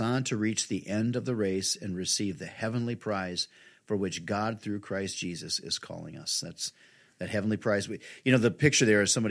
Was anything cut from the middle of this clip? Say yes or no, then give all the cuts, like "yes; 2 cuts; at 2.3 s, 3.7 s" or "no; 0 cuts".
no; 0 cuts